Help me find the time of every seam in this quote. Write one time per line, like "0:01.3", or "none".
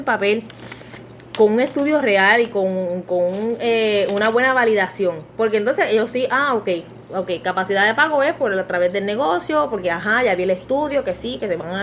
none